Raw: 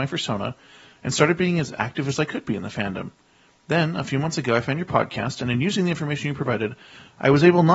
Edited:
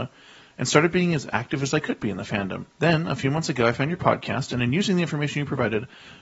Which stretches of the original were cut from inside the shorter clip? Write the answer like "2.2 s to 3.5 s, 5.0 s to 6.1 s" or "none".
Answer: 3.2 s to 3.6 s